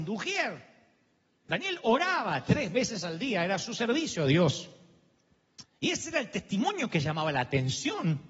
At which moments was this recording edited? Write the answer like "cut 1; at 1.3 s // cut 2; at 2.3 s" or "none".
cut 1; at 1.4 s // cut 2; at 5.6 s